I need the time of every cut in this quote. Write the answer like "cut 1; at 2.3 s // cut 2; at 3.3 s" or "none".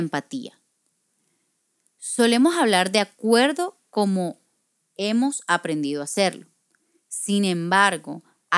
none

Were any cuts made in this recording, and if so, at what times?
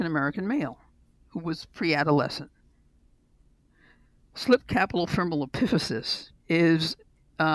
cut 1; at 6.4 s

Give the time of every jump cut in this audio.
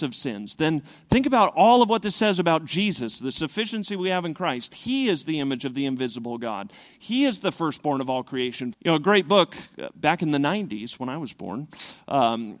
cut 1; at 8.7 s

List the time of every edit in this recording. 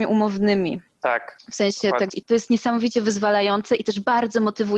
cut 1; at 2.1 s

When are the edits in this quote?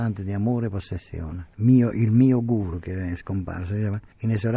cut 1; at 1.5 s

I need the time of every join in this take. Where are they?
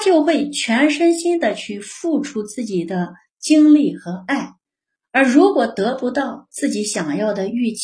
none

